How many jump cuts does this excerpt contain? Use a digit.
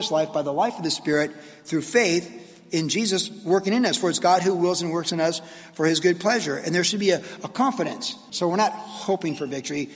1